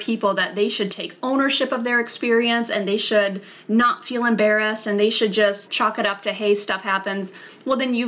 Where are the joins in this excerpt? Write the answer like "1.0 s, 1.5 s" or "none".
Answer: 5.7 s